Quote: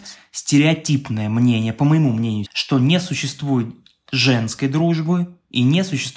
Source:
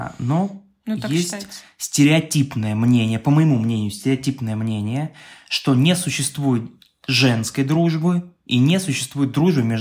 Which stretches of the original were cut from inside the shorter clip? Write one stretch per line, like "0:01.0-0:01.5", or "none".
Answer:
0:03.9-0:05.4